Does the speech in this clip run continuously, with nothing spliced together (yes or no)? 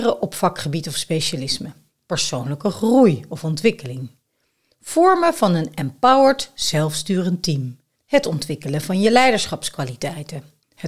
yes